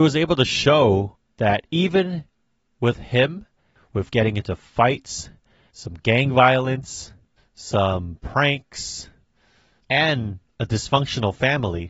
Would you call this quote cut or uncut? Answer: uncut